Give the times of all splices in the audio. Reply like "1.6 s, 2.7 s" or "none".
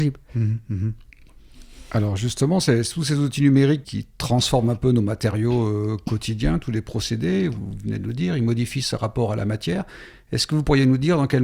3.8 s